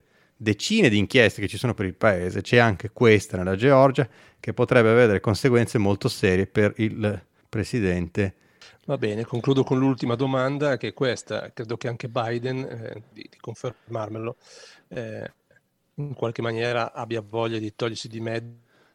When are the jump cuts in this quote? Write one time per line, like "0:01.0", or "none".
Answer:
0:13.1